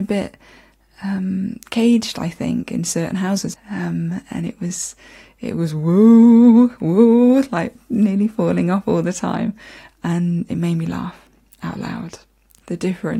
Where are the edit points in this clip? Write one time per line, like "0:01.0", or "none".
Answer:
0:03.5